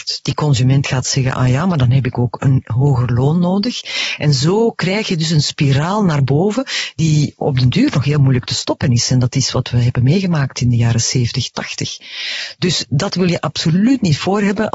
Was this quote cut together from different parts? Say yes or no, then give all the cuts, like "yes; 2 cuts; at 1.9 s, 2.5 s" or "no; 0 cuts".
no; 0 cuts